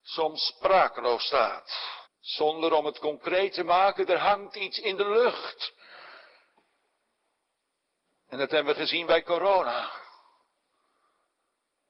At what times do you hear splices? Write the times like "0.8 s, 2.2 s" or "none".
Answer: 2.1 s